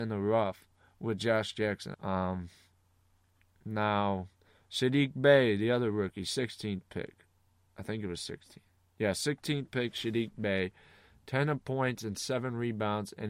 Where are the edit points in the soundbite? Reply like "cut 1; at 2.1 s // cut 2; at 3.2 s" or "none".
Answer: cut 1; at 1.9 s